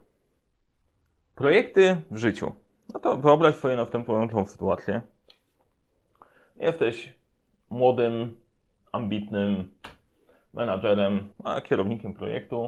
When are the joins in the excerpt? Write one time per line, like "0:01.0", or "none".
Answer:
0:11.3

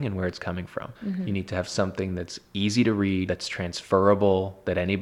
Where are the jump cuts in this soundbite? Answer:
0:00.9
0:03.3

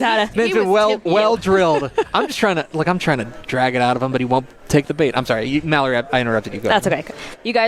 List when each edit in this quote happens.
0:01.1

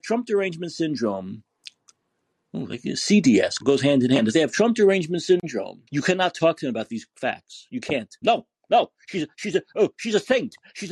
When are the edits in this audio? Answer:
0:03.6
0:05.9
0:08.2

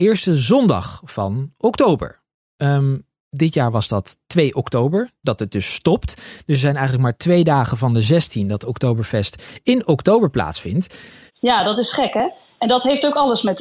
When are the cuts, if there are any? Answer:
0:11.3

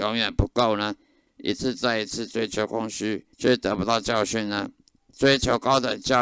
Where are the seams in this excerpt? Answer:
0:01.3
0:03.3

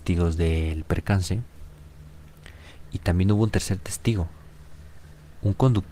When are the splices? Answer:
none

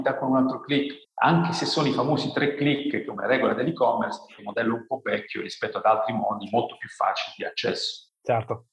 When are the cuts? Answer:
0:01.0
0:04.4

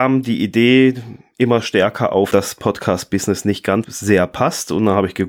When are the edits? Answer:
0:02.3
0:03.8

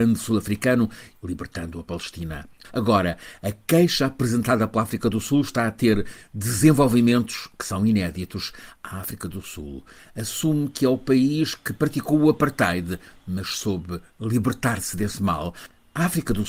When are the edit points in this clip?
0:01.1
0:02.6
0:08.7

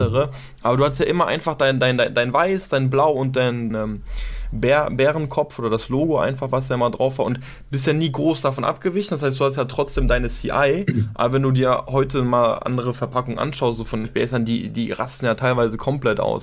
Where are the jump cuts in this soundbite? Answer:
0:03.7

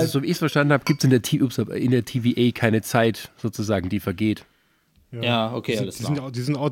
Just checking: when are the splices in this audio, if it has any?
none

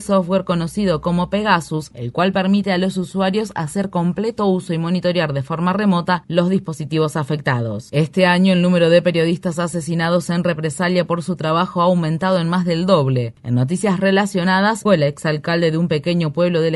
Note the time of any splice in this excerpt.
0:07.9
0:13.3
0:14.9

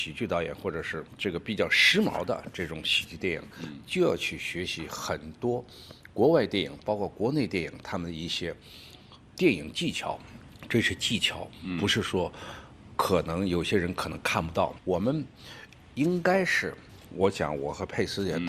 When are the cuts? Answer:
0:14.8

